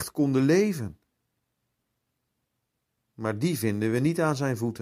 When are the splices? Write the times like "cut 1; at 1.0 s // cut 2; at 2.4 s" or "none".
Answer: none